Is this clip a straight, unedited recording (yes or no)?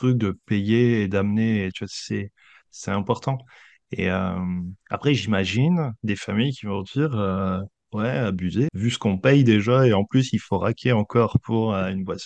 no